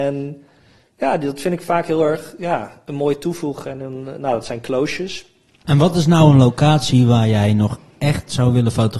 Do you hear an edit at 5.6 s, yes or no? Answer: yes